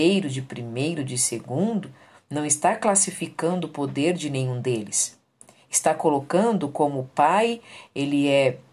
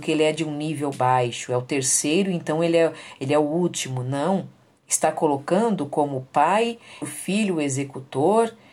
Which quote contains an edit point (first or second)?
second